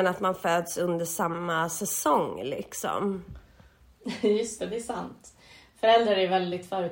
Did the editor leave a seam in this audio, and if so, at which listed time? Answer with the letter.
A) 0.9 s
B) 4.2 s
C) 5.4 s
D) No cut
D